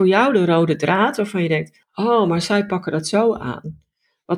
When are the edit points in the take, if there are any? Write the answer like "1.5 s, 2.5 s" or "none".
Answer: none